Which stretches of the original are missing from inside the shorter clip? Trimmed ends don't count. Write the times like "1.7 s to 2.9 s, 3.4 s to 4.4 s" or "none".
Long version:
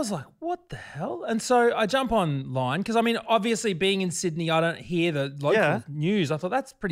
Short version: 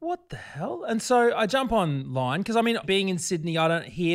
3.2 s to 3.8 s